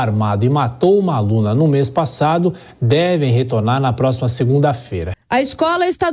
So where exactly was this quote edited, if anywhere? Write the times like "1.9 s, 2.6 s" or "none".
5.1 s

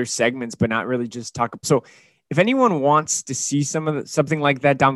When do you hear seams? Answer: 1.6 s

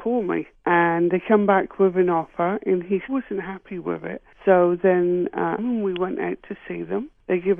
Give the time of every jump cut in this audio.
3.1 s, 5.6 s

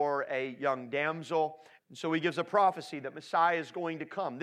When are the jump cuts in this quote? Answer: 1.8 s

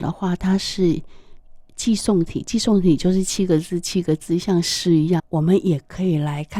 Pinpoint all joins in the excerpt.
5.2 s

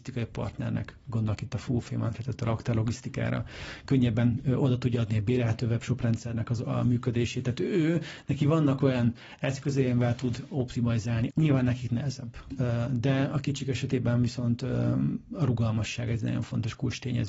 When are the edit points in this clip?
11.3 s

